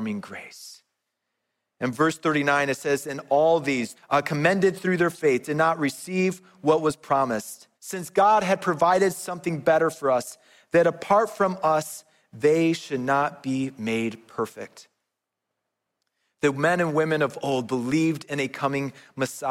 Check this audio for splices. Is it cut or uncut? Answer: cut